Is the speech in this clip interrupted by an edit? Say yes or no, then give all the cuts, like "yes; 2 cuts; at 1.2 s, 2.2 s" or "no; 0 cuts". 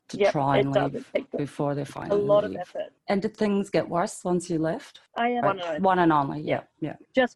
yes; 1 cut; at 5.4 s